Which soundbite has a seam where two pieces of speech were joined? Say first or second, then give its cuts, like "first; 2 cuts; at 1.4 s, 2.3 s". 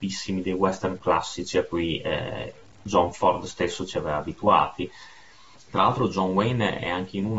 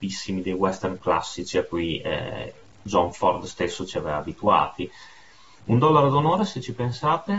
first; 1 cut; at 5.6 s